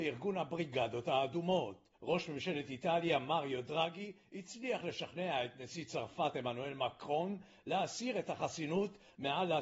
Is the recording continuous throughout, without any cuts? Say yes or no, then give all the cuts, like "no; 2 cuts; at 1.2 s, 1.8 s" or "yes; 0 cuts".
yes; 0 cuts